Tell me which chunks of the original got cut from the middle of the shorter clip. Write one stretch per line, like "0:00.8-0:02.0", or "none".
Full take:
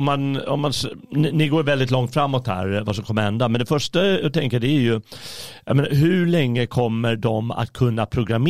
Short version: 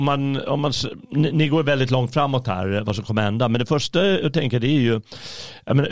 none